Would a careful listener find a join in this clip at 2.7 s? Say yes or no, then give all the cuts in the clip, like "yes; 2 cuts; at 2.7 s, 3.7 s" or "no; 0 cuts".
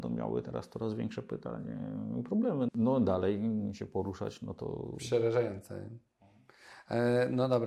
yes; 1 cut; at 2.7 s